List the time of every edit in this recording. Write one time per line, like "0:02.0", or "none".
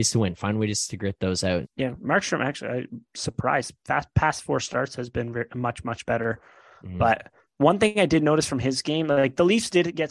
0:01.6